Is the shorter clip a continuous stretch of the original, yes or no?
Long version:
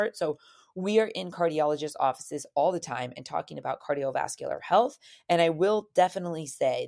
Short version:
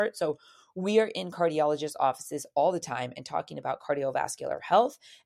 yes